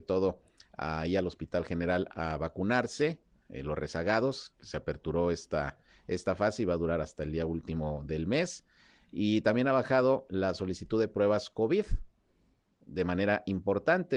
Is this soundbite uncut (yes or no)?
yes